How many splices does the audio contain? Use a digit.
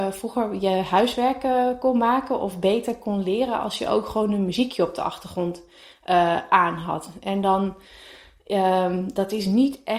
0